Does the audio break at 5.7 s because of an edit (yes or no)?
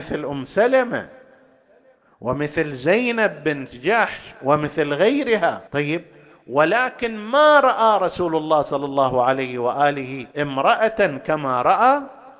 yes